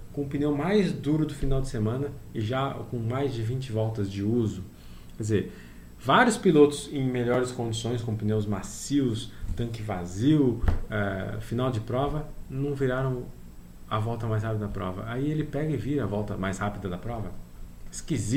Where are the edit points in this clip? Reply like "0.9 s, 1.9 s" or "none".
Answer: none